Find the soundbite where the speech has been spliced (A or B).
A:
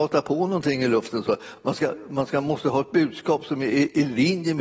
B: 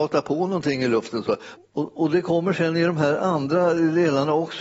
B